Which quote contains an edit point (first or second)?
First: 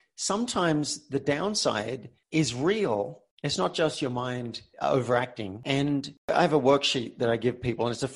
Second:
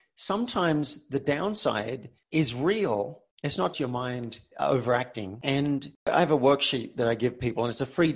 second